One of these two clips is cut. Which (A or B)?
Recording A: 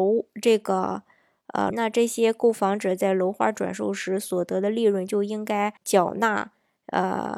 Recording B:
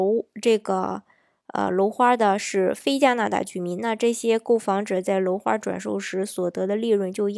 A